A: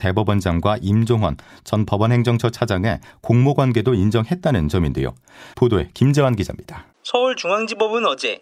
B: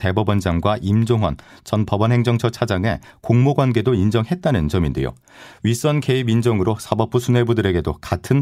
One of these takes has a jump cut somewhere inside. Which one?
A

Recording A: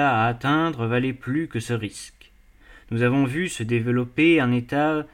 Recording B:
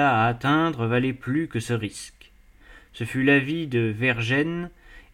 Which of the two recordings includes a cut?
A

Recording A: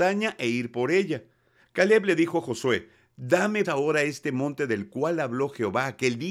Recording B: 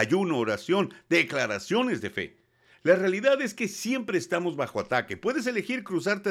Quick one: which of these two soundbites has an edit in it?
A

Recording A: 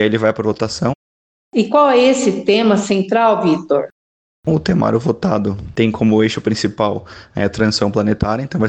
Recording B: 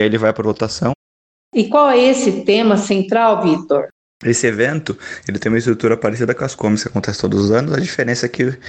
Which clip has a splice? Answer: B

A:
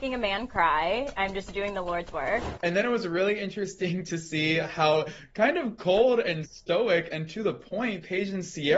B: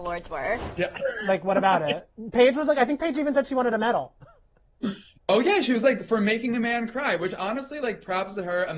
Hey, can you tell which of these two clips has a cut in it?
A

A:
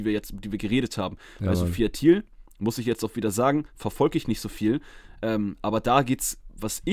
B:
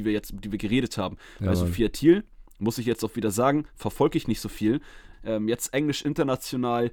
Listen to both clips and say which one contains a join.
B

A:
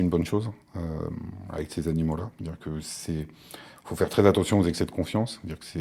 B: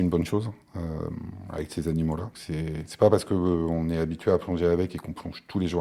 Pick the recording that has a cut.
B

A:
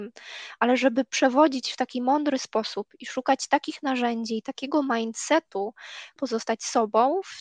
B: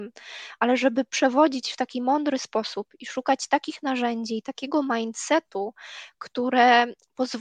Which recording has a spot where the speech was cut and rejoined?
A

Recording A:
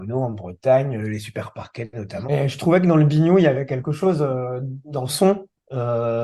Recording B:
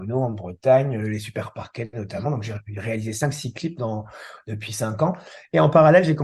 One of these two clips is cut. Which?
A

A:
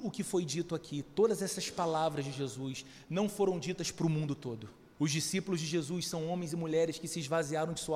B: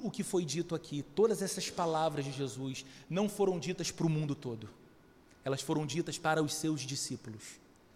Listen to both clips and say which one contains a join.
A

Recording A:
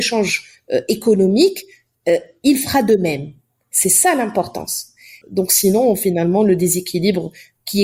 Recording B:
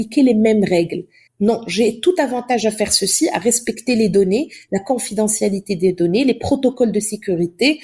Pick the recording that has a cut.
B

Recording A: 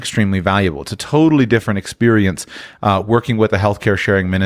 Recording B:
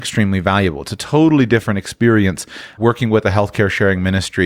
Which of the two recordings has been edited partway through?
B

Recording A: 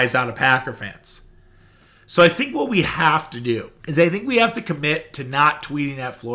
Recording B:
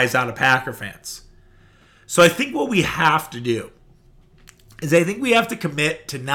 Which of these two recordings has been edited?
A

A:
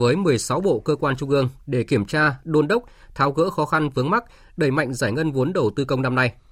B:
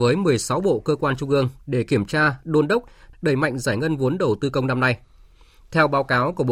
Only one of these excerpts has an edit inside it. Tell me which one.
B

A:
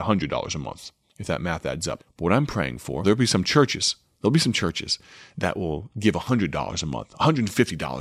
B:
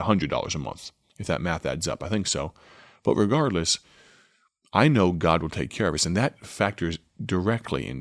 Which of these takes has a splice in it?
A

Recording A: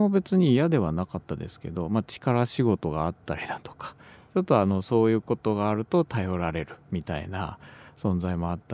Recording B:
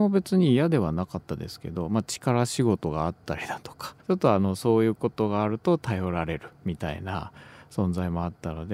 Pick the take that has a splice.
B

